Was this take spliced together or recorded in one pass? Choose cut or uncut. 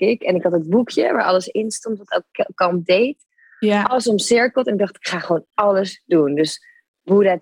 uncut